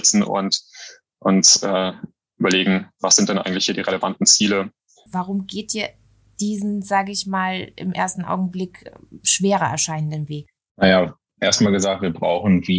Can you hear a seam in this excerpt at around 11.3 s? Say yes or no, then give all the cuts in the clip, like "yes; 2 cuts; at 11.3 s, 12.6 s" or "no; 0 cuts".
no; 1 cut; at 5.1 s